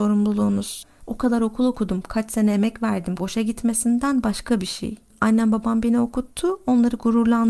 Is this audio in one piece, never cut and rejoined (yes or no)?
no